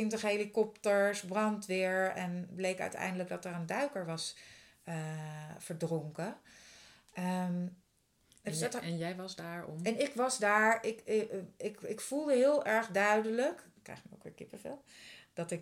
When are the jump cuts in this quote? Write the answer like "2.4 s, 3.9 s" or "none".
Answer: none